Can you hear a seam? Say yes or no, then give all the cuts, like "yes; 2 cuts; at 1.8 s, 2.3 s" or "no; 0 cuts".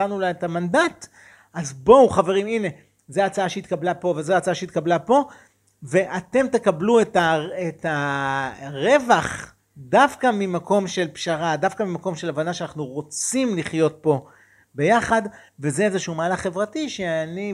no; 0 cuts